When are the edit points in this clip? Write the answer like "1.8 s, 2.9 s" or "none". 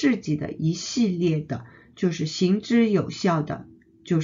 none